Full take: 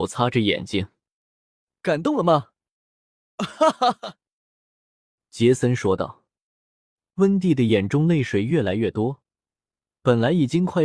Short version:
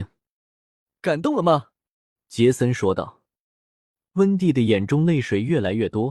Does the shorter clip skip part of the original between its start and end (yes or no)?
yes